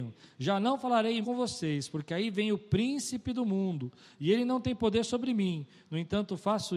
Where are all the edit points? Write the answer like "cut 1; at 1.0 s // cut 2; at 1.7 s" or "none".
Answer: cut 1; at 1.2 s